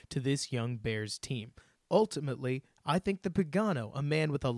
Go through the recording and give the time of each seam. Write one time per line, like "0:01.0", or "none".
0:02.8